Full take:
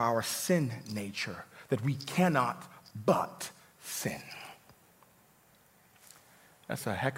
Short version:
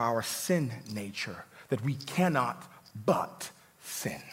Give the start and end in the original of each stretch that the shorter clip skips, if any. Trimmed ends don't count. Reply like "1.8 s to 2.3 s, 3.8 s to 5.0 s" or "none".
none